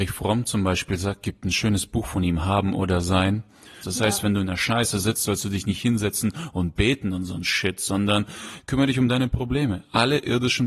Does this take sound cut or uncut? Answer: cut